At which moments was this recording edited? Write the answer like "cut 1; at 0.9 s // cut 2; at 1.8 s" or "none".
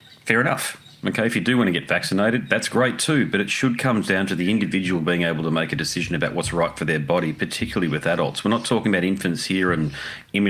none